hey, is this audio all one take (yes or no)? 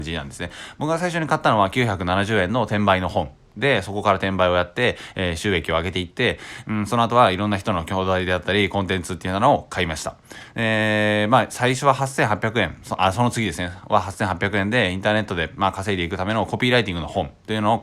yes